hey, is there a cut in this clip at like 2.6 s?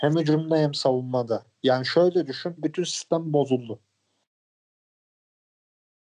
yes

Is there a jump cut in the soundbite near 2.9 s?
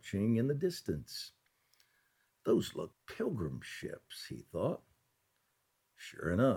yes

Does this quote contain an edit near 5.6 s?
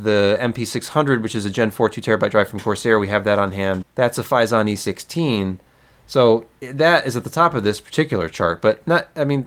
no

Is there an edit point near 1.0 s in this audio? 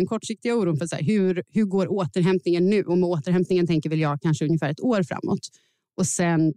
no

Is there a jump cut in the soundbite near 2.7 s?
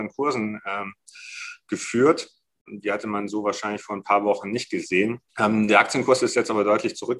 yes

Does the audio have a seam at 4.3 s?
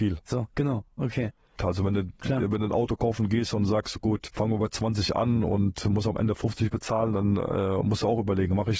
yes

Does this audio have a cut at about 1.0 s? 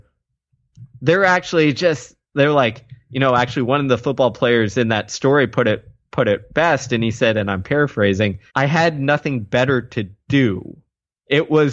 no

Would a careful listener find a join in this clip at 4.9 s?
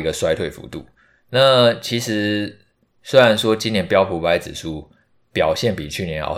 no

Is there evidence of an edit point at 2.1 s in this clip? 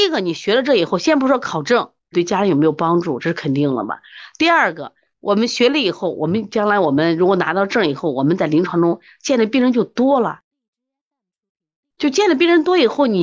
yes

